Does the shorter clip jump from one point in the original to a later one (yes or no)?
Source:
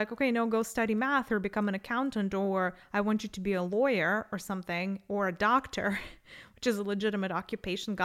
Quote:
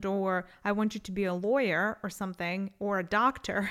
no